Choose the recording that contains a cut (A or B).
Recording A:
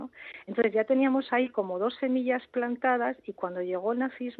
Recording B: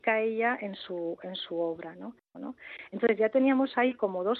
B